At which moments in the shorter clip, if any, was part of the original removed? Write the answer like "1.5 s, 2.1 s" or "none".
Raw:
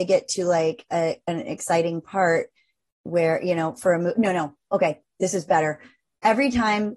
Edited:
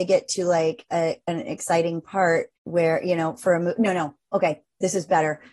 2.5 s

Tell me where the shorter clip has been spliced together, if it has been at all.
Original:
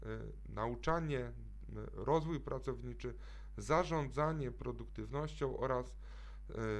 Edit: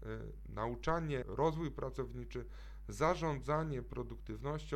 1.2 s

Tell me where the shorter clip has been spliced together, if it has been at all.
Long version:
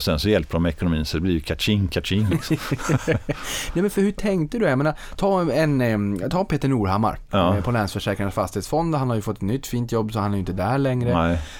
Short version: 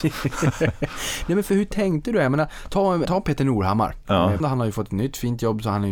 3.1 s, 4.4 s

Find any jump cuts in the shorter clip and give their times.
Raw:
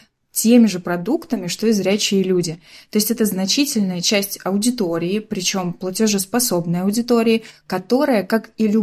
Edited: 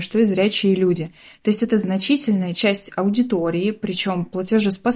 none

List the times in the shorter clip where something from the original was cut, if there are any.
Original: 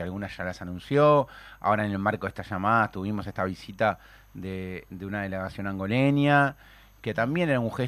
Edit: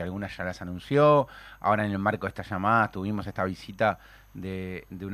none

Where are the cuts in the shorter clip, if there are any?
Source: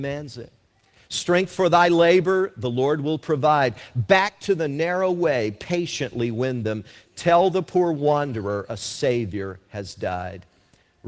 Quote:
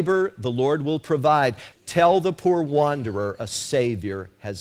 1.7 s

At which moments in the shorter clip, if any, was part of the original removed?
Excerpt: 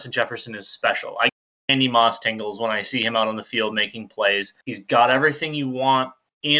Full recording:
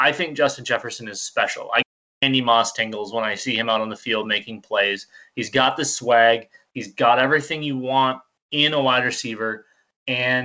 4.6 s

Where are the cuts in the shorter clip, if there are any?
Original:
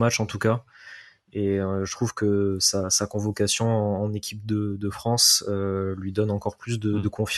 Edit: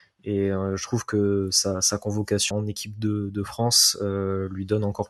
2.5 s

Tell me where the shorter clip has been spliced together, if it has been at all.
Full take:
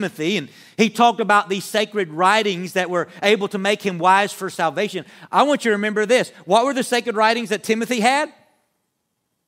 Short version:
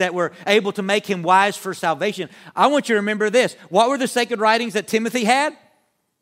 none

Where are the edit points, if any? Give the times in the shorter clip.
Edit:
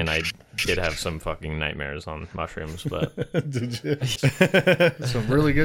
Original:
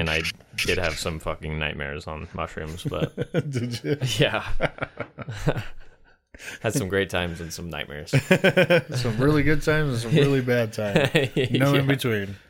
4.2 s

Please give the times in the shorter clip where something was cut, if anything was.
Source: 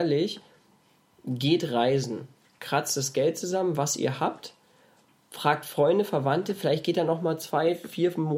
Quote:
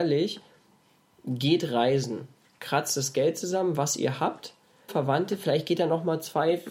4.9 s

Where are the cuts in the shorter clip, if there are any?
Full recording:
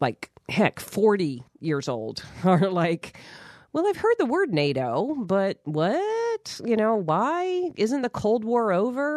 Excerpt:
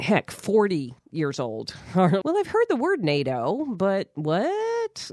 2.2 s

